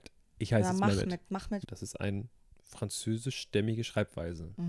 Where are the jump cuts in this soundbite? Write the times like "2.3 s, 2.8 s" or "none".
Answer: 1.6 s